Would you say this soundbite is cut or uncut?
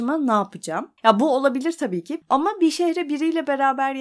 cut